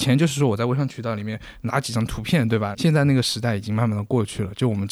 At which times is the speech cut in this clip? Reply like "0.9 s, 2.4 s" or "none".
2.7 s

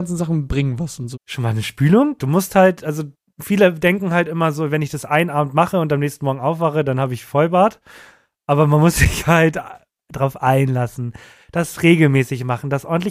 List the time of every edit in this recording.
1.1 s, 2.2 s

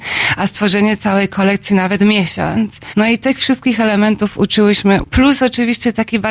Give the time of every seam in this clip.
2.9 s, 5.0 s

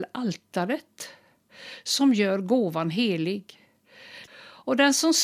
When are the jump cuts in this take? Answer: 4.3 s

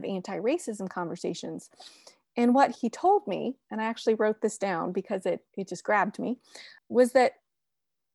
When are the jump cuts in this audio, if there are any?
2.8 s, 5.5 s, 6.8 s

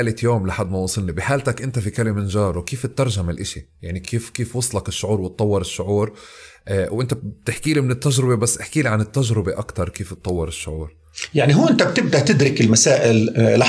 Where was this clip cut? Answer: none

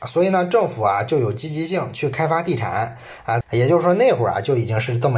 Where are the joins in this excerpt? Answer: 3.4 s

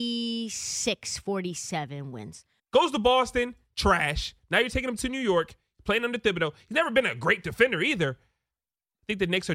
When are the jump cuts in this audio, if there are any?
2.6 s

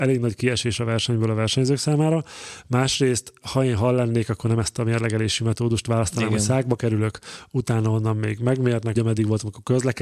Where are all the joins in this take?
9.0 s

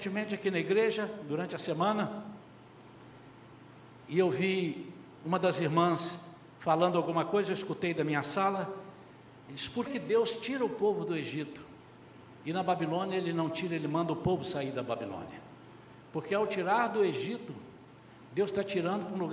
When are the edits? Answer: 9.9 s

